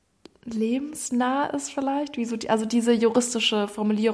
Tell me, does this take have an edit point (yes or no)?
no